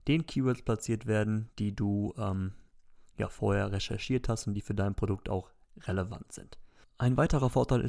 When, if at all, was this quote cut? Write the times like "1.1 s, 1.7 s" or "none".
none